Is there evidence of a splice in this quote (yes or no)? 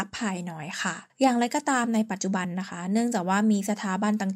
no